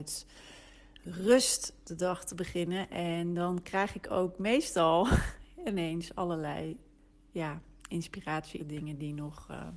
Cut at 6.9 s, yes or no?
no